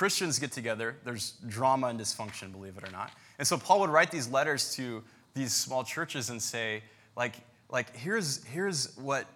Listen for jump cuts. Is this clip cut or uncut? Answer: uncut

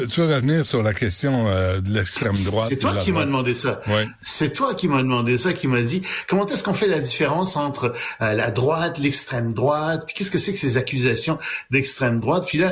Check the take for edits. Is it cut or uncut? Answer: uncut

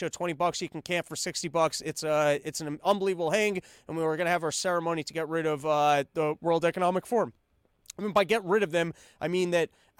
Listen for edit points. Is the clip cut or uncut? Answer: uncut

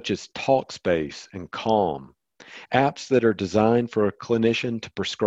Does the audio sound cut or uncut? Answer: uncut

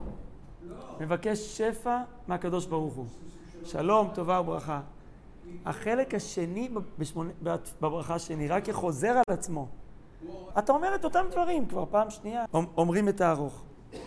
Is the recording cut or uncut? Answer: cut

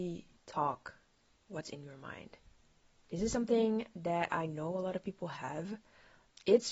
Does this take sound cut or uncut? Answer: cut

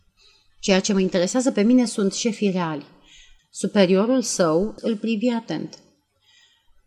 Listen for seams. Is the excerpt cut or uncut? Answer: cut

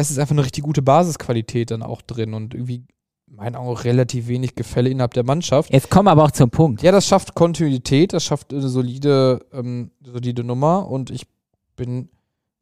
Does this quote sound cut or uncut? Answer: uncut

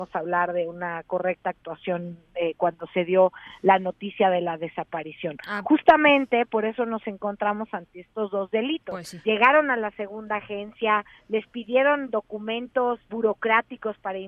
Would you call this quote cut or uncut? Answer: cut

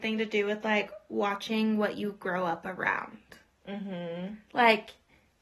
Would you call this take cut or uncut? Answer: uncut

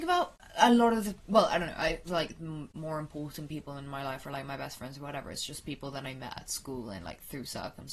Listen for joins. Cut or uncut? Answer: cut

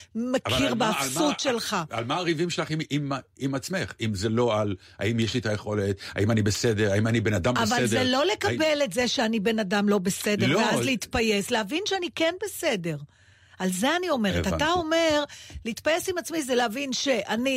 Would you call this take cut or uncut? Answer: uncut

